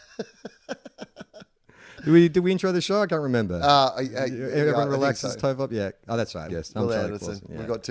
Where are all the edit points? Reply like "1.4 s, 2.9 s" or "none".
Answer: 6.5 s